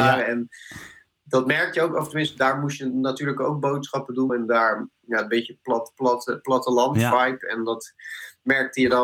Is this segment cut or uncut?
cut